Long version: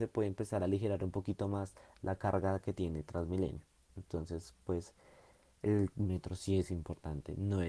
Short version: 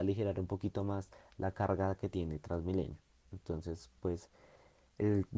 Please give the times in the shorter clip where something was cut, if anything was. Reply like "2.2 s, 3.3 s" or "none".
none